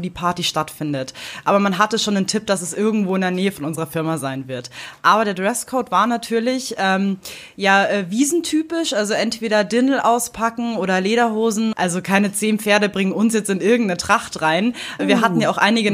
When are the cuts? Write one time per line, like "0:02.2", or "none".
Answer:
0:11.7
0:15.0

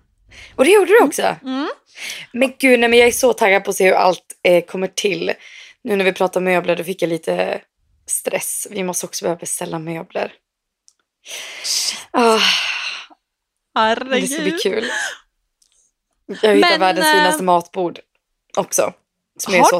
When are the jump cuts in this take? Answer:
none

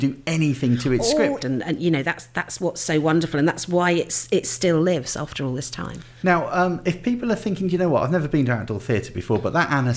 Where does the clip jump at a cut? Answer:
0:01.4
0:06.2

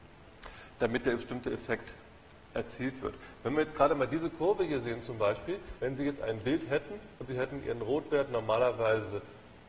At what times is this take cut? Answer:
0:05.8

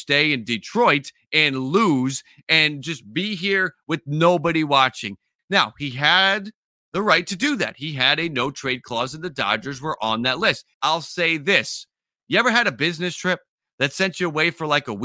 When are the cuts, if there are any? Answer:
0:05.4
0:10.7

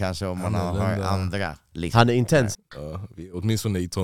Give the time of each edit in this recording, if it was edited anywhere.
0:02.5

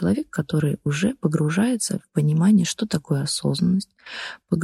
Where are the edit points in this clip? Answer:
none

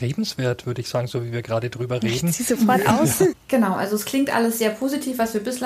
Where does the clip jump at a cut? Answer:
0:03.3

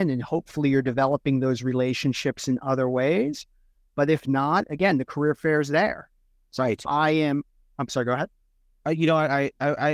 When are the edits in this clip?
none

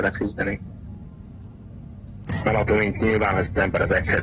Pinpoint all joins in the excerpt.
0:02.4

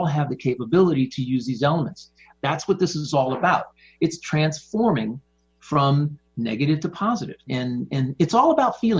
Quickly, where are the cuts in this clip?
0:02.3
0:06.3
0:07.5

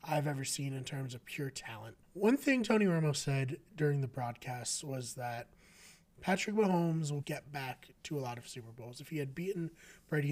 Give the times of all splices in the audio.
0:02.0
0:07.2

